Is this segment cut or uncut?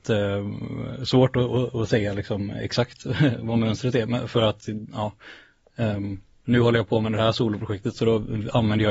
uncut